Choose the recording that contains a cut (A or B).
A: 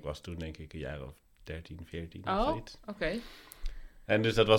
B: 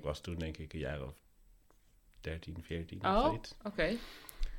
A